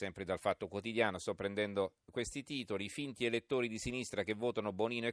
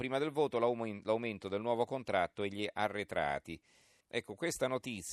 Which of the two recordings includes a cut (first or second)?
second